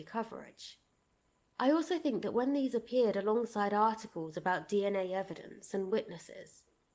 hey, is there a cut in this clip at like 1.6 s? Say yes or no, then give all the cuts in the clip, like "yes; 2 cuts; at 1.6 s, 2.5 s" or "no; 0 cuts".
no; 0 cuts